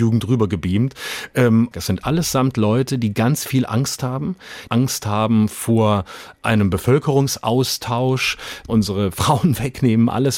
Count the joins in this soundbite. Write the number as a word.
three